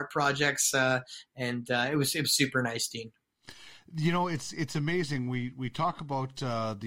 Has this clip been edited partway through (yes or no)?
no